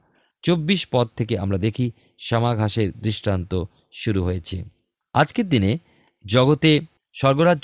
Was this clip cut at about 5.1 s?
no; 0 cuts

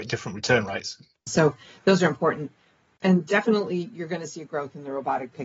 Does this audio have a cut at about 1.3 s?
yes; 1 cut; at 1.3 s

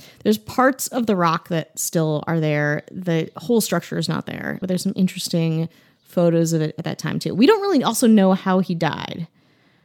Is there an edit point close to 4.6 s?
yes; 1 cut; at 4.6 s

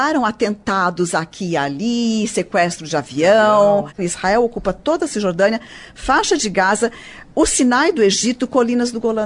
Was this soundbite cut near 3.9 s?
yes; 1 cut; at 3.9 s

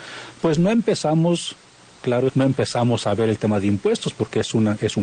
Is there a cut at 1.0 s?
no; 1 cut; at 2.3 s

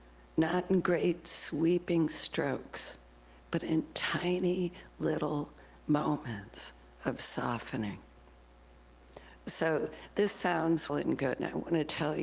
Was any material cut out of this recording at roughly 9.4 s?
no; 1 cut; at 10.9 s

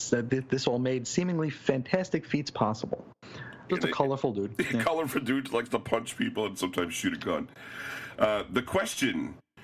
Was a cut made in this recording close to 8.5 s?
no; 1 cut; at 3.7 s

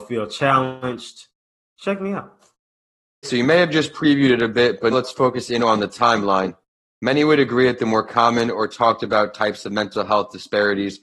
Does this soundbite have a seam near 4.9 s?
yes; 2 cuts; at 3.2 s, 4.9 s

